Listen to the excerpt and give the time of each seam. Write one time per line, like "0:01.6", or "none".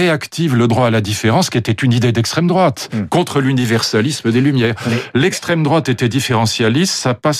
0:04.9